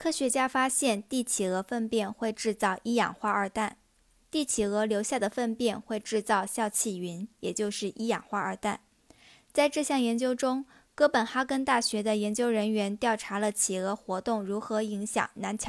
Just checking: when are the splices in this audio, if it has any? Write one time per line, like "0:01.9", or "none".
0:04.2